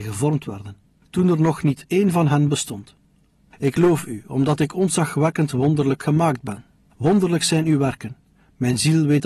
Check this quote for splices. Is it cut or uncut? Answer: cut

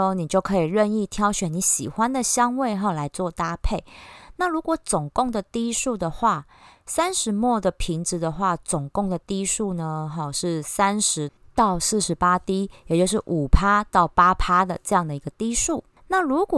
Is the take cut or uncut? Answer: uncut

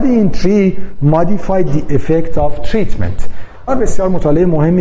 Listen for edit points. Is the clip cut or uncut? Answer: cut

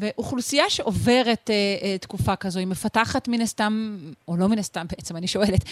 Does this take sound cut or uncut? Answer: uncut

